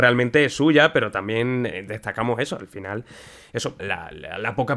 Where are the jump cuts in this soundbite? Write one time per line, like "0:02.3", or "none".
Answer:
0:03.8